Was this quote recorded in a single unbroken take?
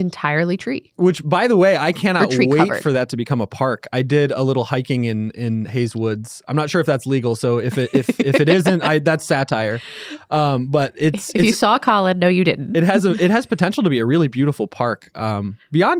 yes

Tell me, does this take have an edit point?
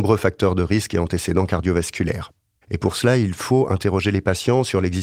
yes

